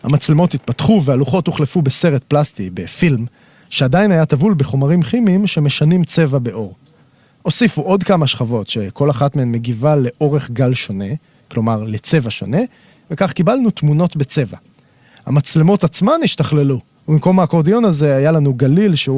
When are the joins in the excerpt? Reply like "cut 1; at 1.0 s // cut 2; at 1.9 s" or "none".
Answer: none

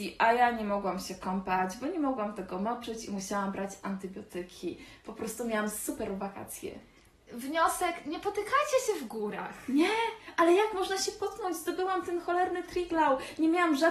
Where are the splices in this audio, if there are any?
none

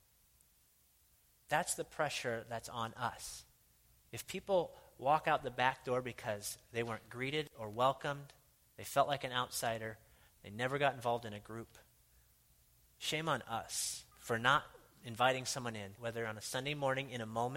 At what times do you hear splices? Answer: cut 1; at 14.1 s // cut 2; at 16.0 s

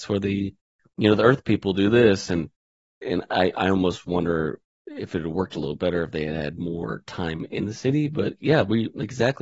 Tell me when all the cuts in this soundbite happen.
none

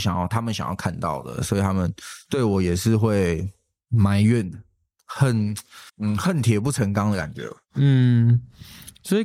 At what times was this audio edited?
cut 1; at 5.9 s

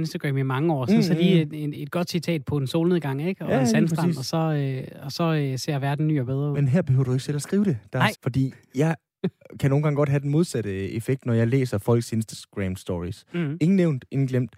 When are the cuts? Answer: cut 1; at 8.1 s

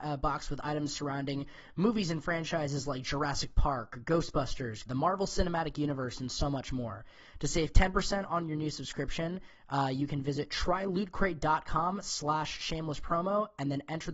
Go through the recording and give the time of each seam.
cut 1; at 4.9 s

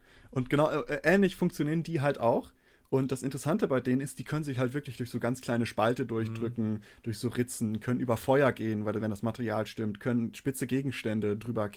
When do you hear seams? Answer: none

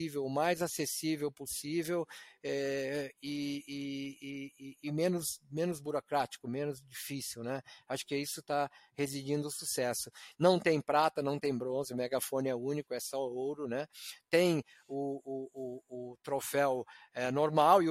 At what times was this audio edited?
cut 1; at 10.3 s

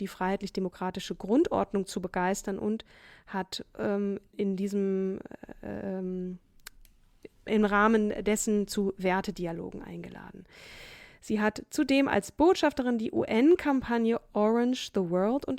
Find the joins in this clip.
cut 1; at 4.3 s // cut 2; at 7.5 s

